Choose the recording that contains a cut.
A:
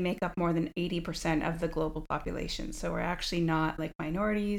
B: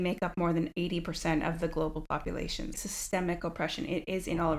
B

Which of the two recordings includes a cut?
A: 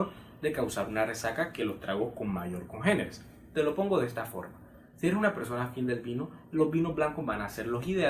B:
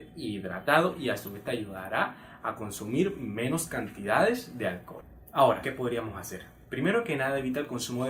B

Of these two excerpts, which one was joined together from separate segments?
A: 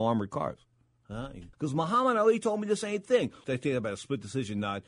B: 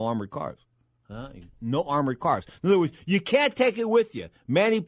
A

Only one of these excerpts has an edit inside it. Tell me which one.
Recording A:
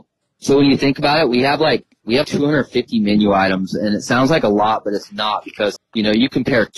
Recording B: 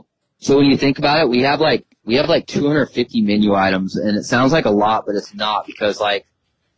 A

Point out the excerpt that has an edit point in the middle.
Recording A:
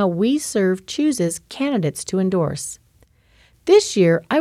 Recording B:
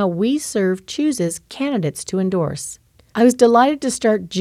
B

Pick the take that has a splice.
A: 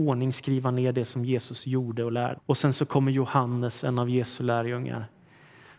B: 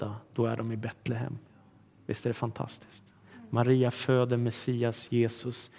A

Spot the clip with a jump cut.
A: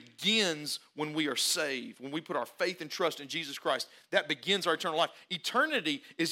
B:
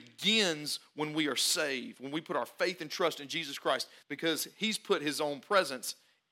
B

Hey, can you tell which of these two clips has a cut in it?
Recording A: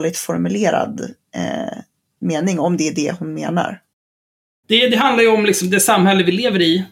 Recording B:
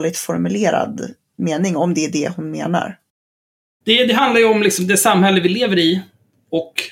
B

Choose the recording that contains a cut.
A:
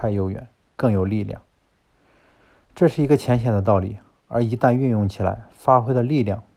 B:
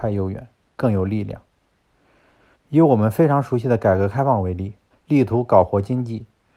B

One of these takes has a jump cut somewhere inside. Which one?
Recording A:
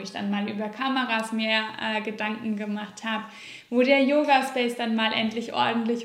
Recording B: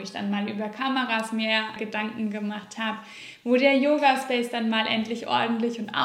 B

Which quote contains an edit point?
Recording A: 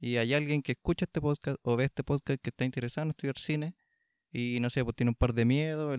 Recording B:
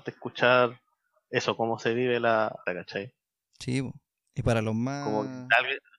B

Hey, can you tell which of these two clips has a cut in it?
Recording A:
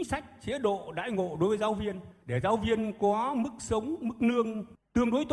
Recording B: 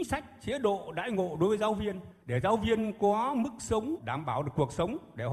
B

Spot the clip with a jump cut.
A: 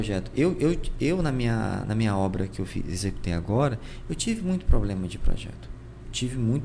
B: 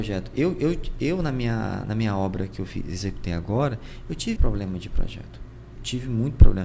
B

